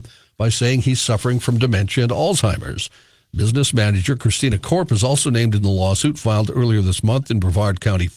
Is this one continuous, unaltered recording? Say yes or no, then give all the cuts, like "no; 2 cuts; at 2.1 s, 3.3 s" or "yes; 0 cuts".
yes; 0 cuts